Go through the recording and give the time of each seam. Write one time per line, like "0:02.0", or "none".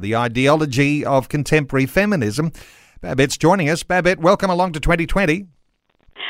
none